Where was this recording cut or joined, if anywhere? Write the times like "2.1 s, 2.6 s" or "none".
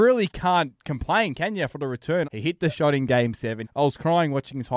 2.2 s, 3.6 s